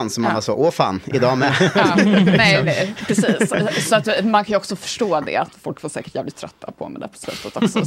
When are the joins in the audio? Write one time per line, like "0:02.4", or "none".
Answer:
none